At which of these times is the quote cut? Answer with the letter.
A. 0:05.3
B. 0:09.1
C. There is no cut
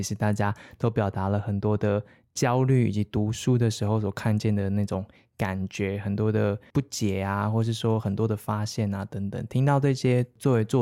C